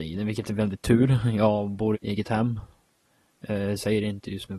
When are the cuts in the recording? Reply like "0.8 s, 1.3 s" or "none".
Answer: 1.9 s